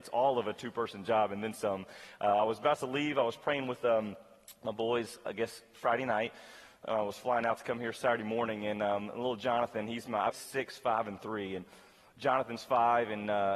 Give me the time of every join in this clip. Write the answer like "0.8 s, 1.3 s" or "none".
10.3 s